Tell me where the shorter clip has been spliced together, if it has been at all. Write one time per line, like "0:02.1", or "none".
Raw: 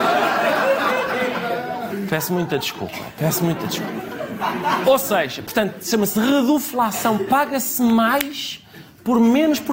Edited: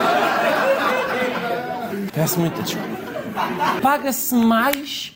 0:02.1
0:03.8